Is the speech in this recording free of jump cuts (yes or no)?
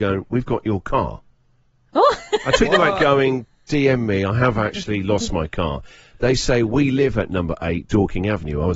yes